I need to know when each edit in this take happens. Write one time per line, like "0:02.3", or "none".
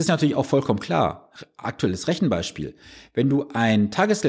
none